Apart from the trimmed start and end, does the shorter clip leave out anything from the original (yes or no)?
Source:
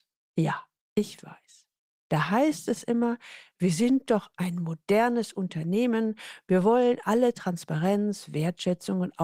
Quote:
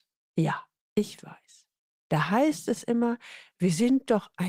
no